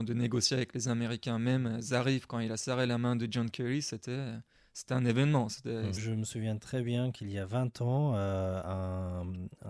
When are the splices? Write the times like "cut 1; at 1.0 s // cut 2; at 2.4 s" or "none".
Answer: cut 1; at 6.0 s